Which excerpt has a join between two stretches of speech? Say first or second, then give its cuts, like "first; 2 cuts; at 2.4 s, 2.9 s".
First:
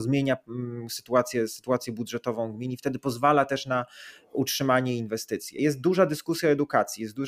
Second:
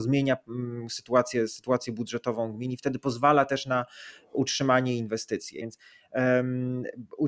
second; 1 cut; at 5.6 s